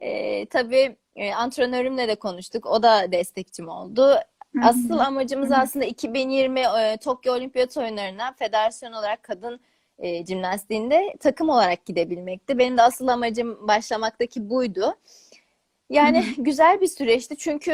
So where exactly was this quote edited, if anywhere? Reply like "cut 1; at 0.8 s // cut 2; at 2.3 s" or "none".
none